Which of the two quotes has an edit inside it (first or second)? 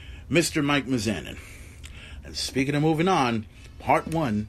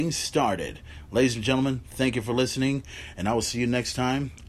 first